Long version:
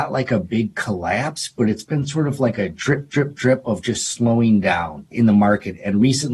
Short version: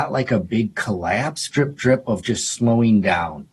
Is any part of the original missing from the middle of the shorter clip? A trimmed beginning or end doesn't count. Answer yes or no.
yes